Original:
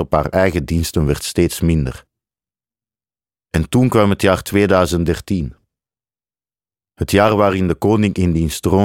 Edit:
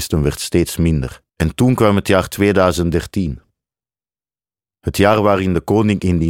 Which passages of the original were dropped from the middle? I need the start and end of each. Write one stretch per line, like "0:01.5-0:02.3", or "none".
0:02.1-0:03.4